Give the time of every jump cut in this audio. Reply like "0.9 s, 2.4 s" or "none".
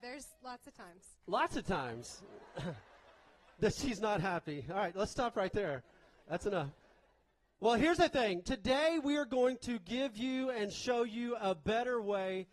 none